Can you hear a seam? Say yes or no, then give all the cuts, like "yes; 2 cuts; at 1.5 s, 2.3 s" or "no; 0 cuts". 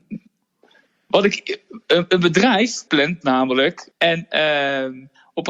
yes; 2 cuts; at 2.9 s, 3.9 s